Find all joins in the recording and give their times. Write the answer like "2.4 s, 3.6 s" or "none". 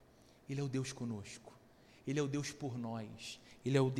none